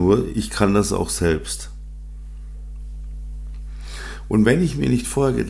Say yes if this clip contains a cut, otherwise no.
no